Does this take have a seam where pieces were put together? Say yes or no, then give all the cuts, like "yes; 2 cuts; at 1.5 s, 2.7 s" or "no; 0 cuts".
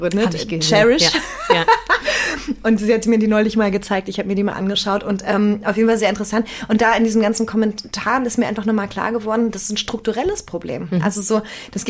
no; 0 cuts